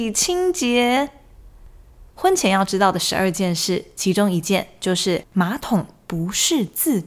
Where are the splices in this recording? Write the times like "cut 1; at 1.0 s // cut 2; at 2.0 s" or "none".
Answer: cut 1; at 5.3 s